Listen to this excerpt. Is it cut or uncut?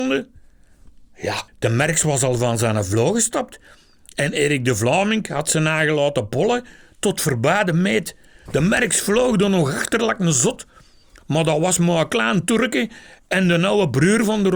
cut